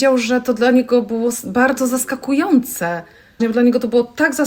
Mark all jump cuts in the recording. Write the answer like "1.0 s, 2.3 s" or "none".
3.4 s